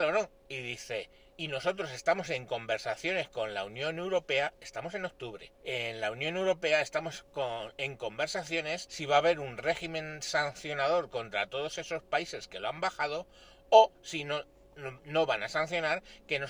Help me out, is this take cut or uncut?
cut